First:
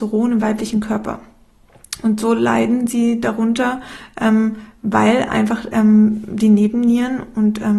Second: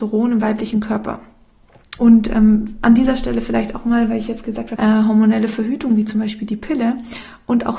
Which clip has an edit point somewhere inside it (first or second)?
second